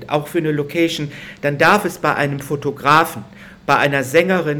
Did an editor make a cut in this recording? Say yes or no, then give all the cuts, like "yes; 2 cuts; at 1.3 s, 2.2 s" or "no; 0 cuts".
no; 0 cuts